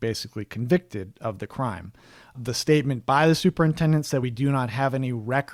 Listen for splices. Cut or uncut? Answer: uncut